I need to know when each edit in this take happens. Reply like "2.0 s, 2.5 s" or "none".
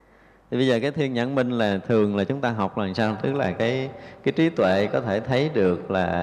none